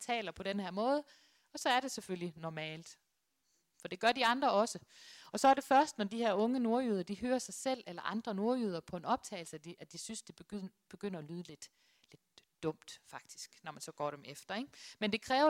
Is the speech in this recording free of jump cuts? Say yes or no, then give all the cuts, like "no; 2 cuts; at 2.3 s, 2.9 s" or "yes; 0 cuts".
yes; 0 cuts